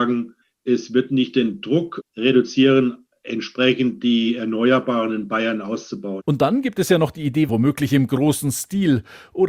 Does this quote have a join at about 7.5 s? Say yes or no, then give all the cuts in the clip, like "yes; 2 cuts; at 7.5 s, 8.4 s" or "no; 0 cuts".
yes; 2 cuts; at 6.2 s, 7.5 s